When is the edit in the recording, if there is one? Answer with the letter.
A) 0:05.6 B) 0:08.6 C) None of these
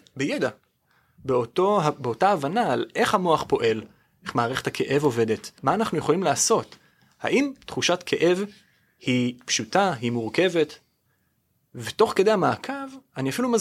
A